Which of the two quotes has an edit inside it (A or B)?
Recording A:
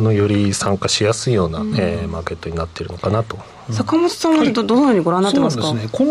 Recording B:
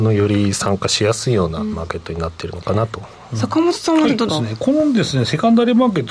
B